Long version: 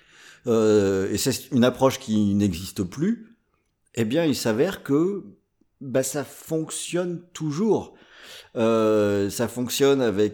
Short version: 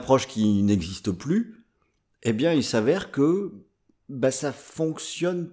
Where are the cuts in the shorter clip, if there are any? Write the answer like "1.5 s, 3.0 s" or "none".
none